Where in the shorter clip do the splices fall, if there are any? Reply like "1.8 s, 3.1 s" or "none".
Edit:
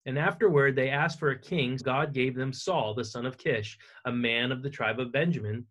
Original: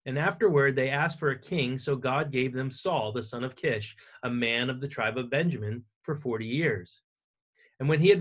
1.8 s